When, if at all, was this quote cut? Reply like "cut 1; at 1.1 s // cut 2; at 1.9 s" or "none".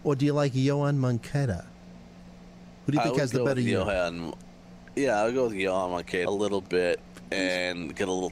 cut 1; at 6.3 s